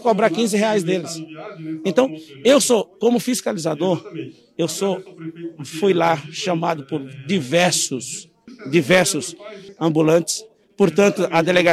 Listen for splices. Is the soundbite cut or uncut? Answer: uncut